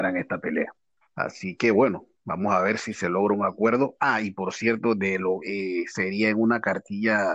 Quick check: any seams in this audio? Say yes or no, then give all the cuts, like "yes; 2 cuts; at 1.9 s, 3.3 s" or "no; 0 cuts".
yes; 2 cuts; at 1.0 s, 5.4 s